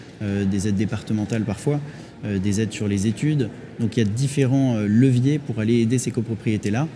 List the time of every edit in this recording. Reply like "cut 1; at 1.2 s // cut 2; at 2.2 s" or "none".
none